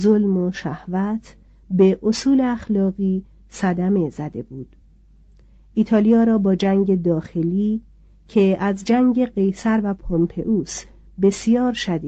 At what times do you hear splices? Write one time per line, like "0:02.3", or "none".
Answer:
none